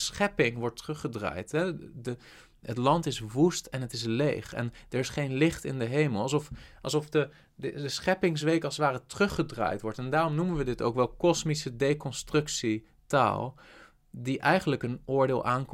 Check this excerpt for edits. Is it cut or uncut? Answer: uncut